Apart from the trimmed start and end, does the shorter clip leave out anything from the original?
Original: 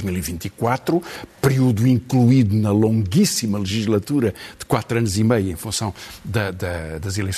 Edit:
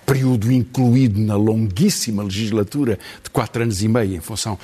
no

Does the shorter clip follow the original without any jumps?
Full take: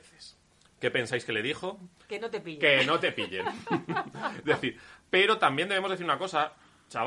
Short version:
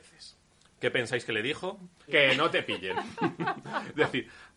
no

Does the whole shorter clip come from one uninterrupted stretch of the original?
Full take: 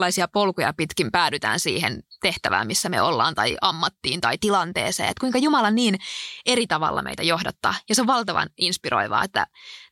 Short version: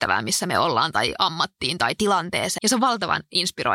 no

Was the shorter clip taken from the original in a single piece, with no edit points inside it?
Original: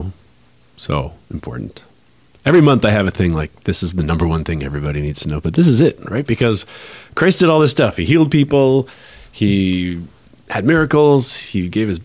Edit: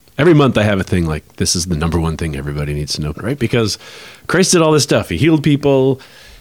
no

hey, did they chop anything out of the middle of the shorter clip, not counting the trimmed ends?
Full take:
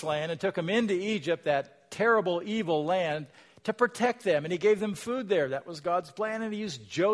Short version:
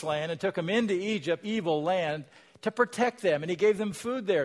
yes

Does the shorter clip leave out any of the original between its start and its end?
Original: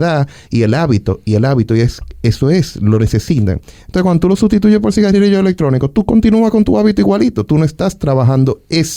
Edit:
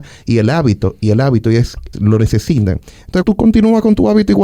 yes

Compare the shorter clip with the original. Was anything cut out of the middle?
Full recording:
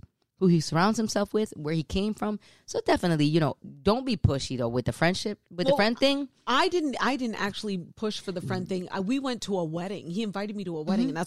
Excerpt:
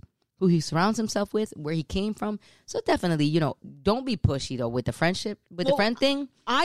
no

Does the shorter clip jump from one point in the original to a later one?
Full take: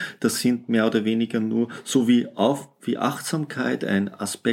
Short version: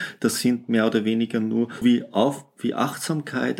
yes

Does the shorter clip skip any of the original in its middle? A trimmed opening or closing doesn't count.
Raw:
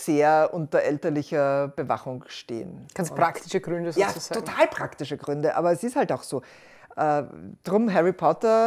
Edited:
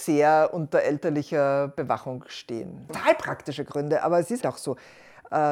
yes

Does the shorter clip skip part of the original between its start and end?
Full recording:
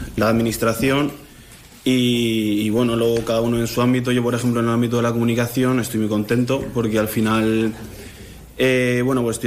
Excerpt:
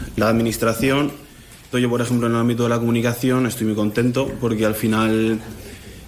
yes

